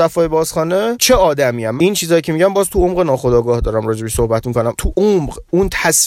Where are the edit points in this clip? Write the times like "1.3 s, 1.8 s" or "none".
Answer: 1.8 s